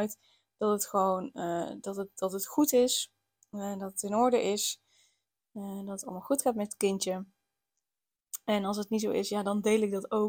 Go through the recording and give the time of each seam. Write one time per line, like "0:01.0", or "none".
none